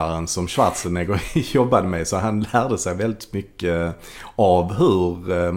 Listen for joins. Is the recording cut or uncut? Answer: uncut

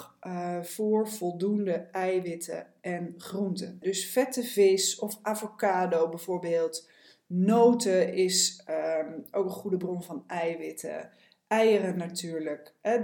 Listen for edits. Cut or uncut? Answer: cut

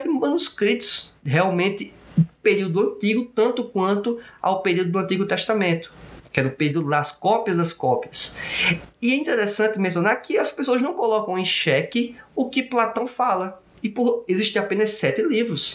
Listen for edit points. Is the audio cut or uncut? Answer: uncut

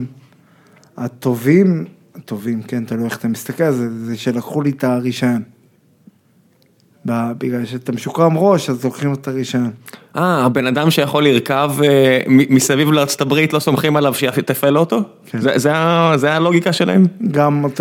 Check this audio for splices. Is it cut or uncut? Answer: uncut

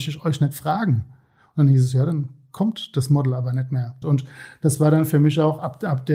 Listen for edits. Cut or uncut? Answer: cut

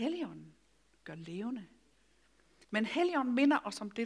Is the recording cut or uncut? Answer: cut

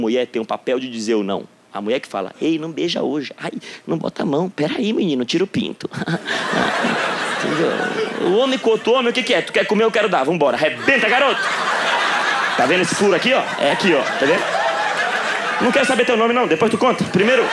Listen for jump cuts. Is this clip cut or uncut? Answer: uncut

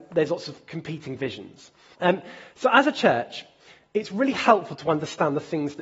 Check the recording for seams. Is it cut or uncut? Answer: cut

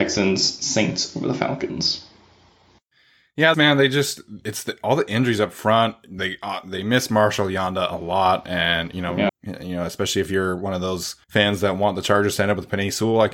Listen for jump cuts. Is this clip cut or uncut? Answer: cut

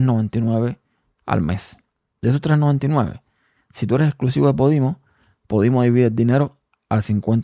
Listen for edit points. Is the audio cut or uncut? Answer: uncut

